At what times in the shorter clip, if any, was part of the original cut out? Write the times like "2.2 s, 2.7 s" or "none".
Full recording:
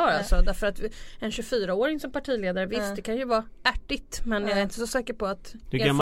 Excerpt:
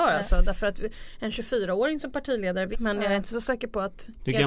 2.7 s